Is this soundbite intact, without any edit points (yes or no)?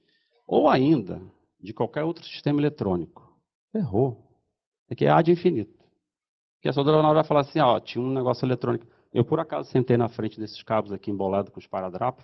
yes